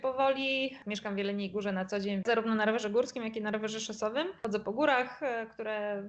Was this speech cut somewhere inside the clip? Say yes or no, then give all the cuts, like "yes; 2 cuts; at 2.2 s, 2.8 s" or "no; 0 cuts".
yes; 1 cut; at 2.2 s